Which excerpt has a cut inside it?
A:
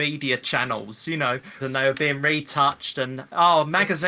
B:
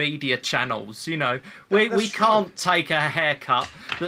A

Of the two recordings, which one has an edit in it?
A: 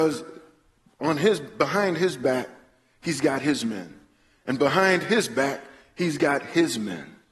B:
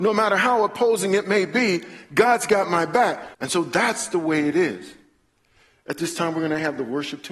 B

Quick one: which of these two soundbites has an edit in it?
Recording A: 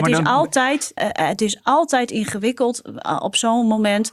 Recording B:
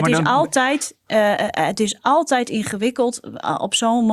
A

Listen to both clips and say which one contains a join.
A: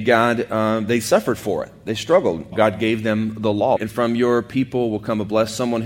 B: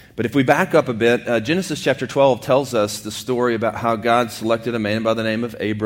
A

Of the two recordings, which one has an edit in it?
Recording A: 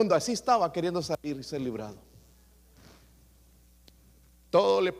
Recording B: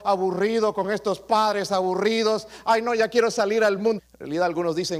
B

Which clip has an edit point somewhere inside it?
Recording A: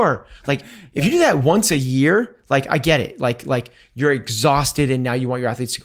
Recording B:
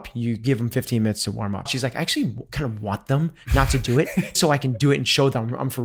B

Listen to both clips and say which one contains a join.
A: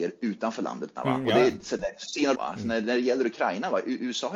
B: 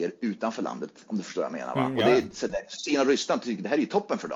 A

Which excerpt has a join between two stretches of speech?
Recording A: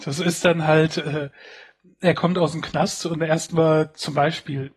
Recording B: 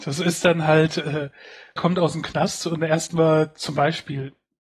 B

